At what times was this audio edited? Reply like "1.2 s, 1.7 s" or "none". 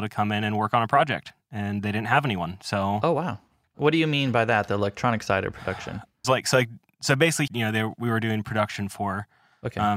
6.2 s, 7.5 s